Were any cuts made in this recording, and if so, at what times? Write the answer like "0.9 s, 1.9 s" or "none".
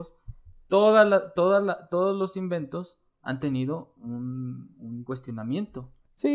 none